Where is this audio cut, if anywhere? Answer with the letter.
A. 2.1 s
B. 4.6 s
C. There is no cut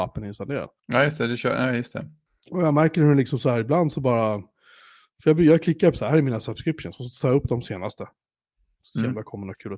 C